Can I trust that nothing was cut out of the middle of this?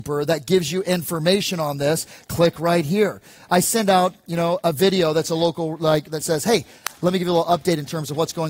yes; 0 cuts

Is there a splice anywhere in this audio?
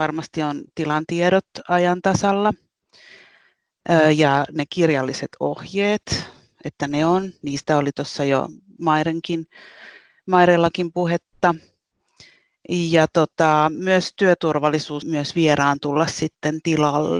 yes; 1 cut; at 15.0 s

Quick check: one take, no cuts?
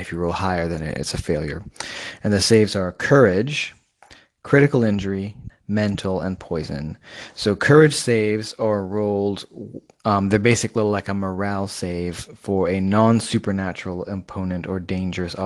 no; 1 cut; at 5.5 s

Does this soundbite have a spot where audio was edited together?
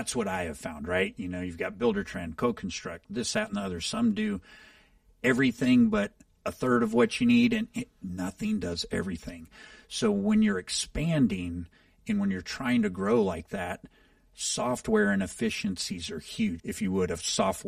yes; 1 cut; at 16.6 s

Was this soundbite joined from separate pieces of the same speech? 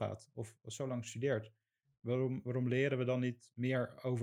no; 0 cuts

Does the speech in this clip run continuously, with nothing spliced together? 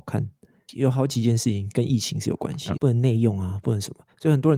no; 1 cut; at 2.8 s

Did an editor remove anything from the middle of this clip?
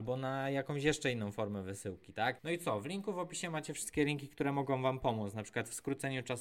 yes; 1 cut; at 2.4 s

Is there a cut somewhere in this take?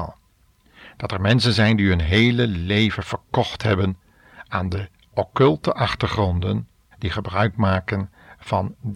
yes; 1 cut; at 6.9 s

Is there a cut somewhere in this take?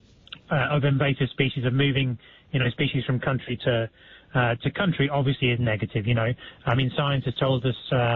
no; 0 cuts

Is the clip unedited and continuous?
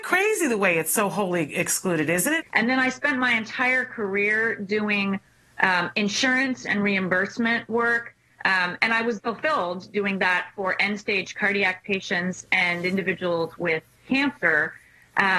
no; 2 cuts; at 2.4 s, 9.2 s

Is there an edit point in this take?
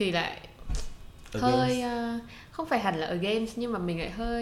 no; 0 cuts

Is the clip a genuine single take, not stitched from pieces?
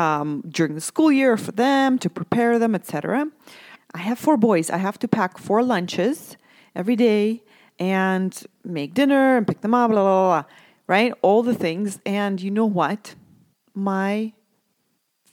no; 1 cut; at 3.7 s

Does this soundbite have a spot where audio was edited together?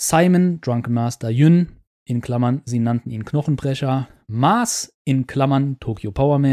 no; 0 cuts

